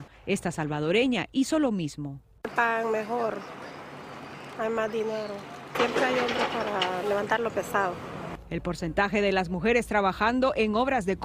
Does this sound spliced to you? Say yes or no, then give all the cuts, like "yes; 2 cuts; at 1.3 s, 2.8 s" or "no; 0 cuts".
no; 0 cuts